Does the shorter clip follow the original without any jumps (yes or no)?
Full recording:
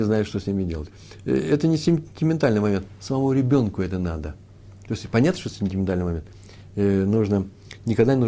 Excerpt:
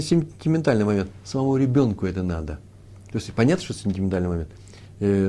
yes